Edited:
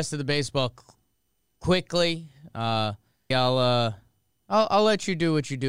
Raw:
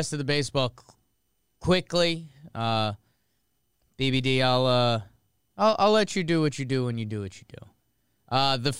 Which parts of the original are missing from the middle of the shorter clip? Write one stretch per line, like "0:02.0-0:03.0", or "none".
0:03.3-0:04.4

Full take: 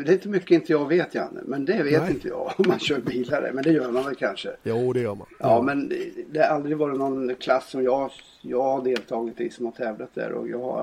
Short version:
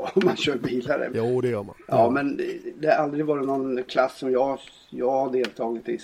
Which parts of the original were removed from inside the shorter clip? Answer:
0:03.5-0:04.6

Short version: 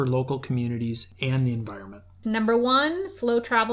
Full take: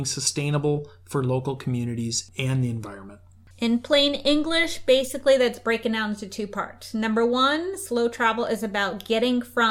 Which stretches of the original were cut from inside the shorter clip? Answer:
0:03.4-0:06.9

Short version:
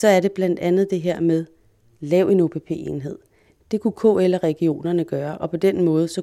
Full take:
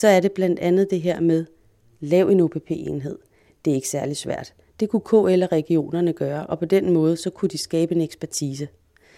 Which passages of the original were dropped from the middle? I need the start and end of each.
0:03.6-0:04.7

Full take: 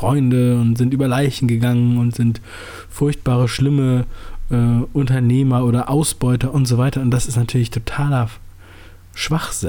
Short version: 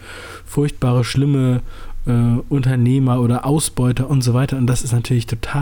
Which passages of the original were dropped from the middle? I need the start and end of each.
none

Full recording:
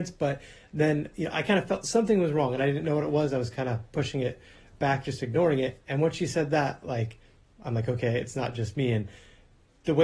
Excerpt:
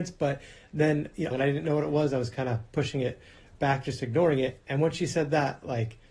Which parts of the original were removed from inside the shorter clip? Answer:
0:01.3-0:02.5

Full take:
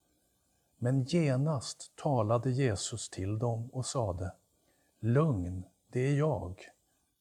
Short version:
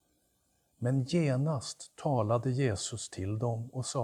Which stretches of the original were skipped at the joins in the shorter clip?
none

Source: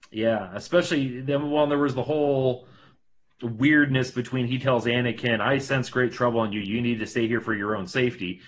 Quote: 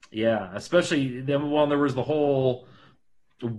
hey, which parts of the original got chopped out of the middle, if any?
none

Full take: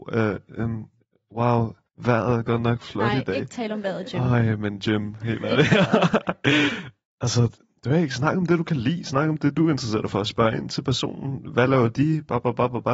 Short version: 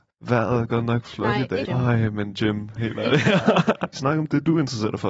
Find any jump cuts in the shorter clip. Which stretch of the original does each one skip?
0:03.4-0:04.1
0:06.4-0:09.0

